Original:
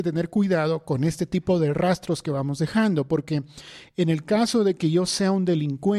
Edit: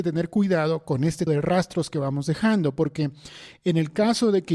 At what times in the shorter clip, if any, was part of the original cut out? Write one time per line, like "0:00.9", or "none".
0:01.3